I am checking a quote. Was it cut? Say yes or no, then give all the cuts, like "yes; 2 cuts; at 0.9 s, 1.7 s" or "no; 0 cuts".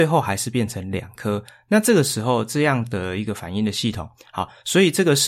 yes; 1 cut; at 4.2 s